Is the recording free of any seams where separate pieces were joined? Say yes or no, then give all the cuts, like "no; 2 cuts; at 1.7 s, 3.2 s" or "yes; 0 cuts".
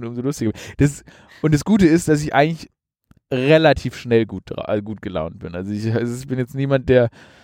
yes; 0 cuts